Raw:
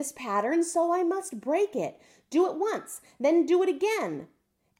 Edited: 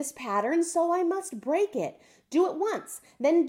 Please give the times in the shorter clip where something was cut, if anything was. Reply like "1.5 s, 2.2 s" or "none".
none